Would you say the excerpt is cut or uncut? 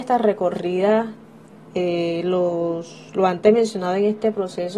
uncut